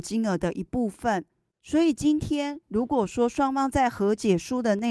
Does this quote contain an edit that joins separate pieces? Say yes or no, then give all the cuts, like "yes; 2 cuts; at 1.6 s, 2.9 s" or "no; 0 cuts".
no; 0 cuts